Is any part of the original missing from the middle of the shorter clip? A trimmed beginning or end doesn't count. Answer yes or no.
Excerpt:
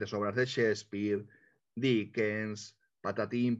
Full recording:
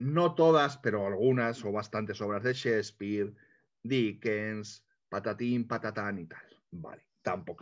no